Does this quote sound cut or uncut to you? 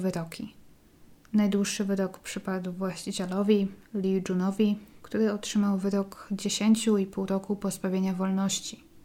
uncut